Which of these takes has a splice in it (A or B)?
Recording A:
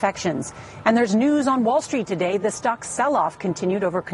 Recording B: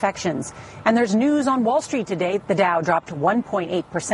B